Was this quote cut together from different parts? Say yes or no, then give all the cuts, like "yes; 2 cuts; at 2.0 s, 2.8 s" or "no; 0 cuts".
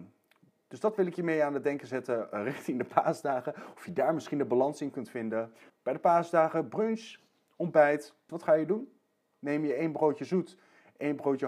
yes; 2 cuts; at 5.7 s, 8.3 s